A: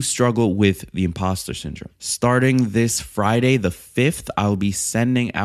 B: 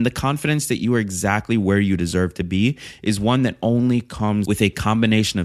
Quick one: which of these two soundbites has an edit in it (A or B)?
A